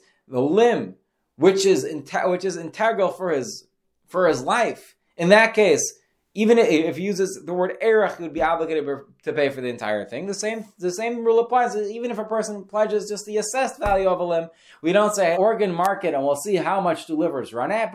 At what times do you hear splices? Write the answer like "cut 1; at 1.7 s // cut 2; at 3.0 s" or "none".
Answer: cut 1; at 15.3 s